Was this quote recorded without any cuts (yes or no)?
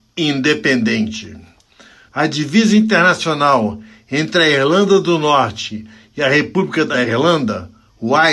no